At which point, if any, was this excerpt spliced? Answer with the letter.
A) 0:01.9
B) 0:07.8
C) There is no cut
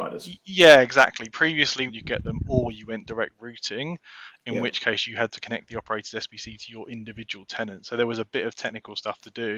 A